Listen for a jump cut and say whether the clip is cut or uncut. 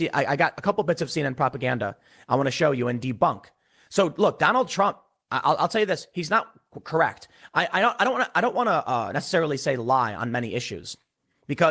uncut